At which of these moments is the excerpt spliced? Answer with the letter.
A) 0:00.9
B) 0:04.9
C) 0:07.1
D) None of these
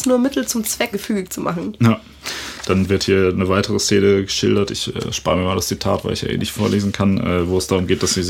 A